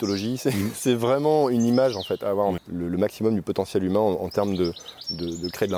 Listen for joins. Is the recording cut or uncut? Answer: cut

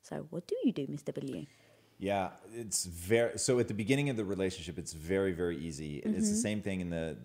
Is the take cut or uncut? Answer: cut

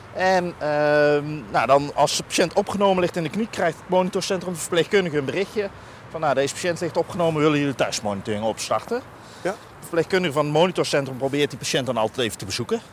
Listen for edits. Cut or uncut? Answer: uncut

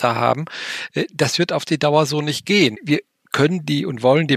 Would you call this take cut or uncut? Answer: cut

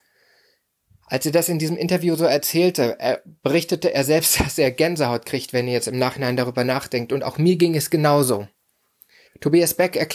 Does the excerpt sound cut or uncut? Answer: cut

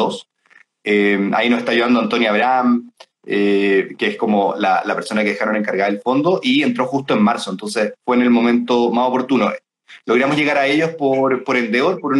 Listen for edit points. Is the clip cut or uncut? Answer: uncut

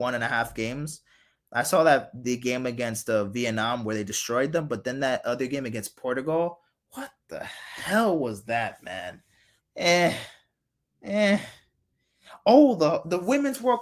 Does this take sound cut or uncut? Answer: cut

